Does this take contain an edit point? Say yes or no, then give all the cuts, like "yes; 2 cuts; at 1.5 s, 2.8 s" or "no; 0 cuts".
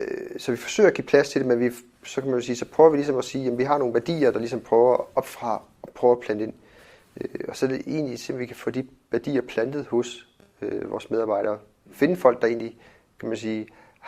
no; 0 cuts